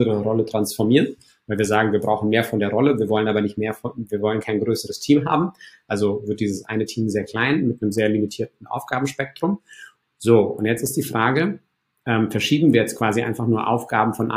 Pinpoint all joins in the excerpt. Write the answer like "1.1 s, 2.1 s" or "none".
10.0 s